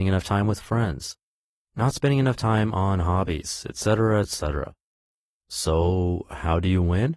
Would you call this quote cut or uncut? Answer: cut